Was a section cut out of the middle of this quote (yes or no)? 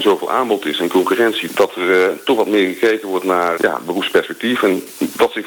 yes